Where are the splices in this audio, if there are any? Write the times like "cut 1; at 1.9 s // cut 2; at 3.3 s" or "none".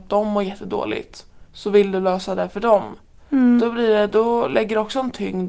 cut 1; at 1.4 s // cut 2; at 3.2 s